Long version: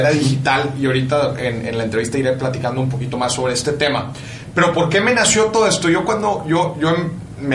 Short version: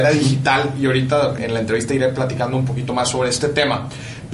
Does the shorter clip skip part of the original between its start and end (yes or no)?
yes